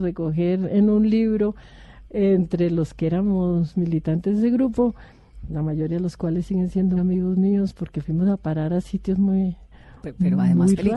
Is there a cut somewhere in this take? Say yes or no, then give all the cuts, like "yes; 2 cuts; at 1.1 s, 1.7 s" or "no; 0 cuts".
yes; 1 cut; at 7.0 s